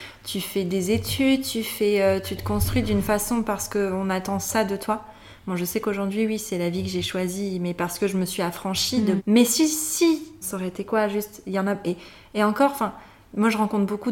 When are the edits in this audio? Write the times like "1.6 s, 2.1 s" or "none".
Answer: 9.2 s, 10.4 s